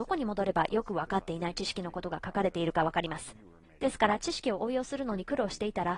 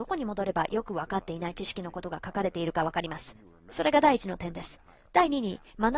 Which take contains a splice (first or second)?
first